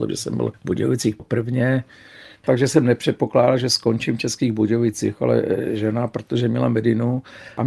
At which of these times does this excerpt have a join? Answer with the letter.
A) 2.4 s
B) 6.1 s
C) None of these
A